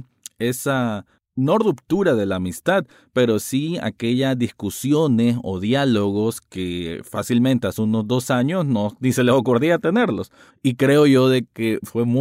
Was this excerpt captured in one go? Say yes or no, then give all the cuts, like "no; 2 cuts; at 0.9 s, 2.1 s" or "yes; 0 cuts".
no; 1 cut; at 10.5 s